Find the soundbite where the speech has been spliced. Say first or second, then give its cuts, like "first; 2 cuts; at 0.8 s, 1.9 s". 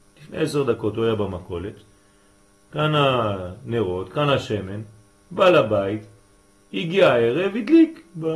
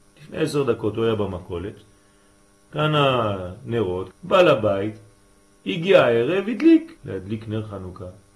second; 2 cuts; at 4.1 s, 7.0 s